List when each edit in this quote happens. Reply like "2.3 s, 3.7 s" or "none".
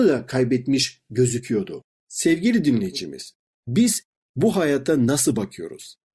1.9 s